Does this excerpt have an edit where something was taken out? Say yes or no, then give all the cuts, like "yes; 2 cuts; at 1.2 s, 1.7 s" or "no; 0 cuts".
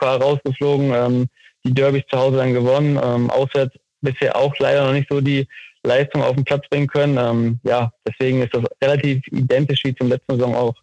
no; 0 cuts